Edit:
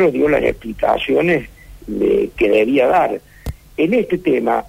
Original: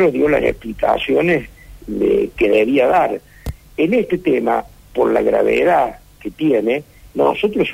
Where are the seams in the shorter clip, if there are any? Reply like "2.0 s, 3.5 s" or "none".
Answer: none